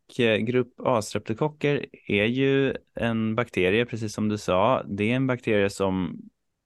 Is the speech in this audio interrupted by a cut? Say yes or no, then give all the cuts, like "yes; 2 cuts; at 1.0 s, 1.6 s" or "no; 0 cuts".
no; 0 cuts